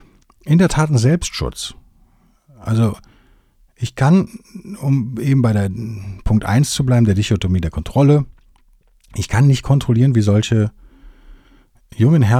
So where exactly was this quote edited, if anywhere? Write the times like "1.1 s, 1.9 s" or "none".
none

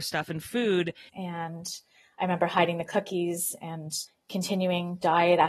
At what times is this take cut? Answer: 1.1 s, 4.1 s

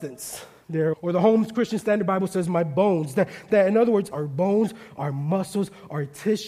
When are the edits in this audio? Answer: 0.9 s, 4.1 s

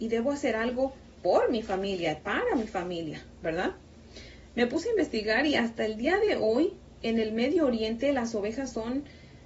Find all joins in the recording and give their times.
1.1 s

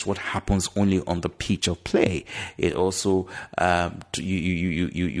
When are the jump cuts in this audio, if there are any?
none

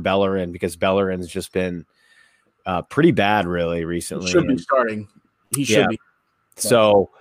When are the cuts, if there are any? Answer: none

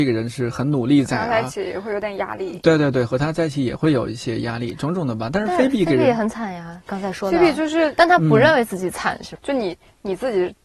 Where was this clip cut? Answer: 9.4 s

